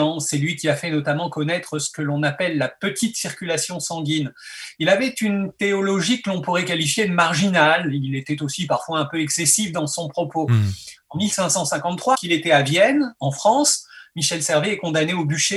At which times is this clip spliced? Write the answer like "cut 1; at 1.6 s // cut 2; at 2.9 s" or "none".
cut 1; at 12.1 s